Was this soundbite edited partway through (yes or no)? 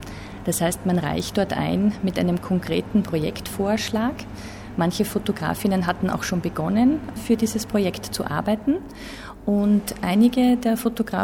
no